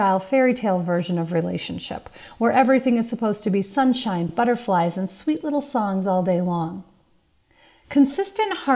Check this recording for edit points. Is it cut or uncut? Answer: uncut